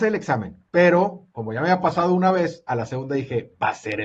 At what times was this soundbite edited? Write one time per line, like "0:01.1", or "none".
none

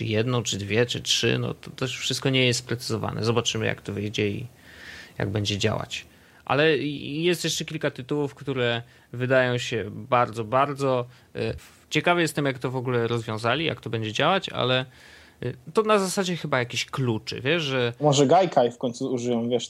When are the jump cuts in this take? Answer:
0:11.6

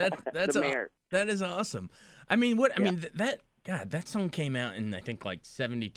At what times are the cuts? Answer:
none

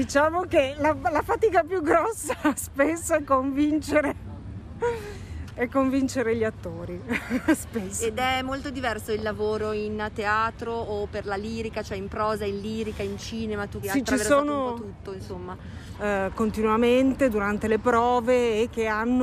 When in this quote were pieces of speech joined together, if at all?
0:13.8
0:15.9

